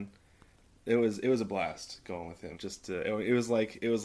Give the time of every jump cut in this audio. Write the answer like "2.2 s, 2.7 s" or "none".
2.5 s